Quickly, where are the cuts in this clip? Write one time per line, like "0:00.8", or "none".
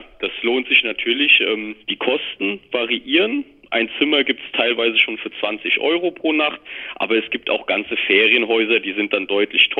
0:01.8